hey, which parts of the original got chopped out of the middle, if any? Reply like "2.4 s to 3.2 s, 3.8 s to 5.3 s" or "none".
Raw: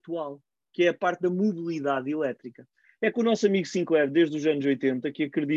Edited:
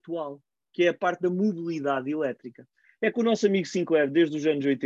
none

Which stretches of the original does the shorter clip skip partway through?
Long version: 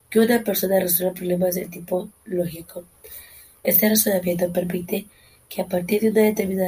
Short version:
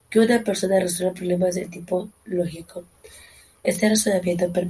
none

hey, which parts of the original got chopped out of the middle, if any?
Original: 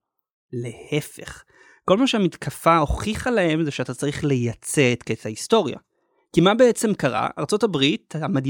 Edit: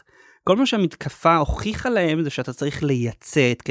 none

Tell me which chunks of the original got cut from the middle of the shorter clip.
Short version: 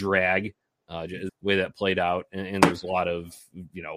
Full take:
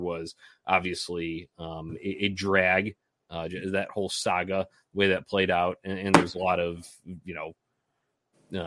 3.7 s to 4.8 s

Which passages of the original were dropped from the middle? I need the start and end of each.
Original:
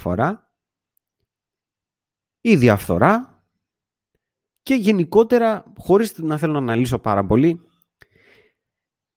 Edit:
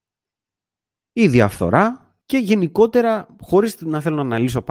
3.5 s to 4.6 s

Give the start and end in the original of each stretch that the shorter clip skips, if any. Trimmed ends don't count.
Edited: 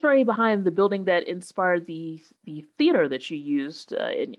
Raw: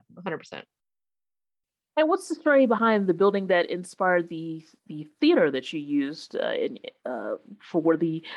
none

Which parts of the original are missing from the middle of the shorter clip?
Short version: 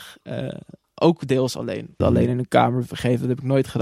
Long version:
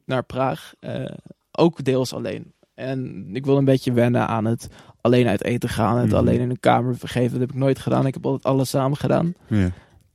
2.6 s to 6.1 s

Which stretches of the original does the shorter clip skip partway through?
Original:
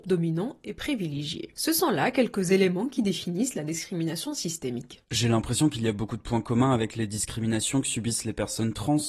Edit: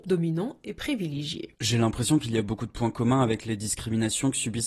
1.5 s to 5.1 s

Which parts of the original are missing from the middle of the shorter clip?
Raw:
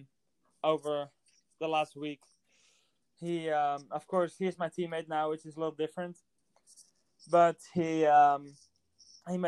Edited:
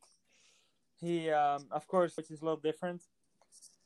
4.4 s to 5.3 s

